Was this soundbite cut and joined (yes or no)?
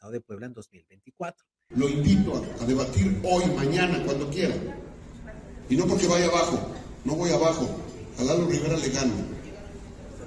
yes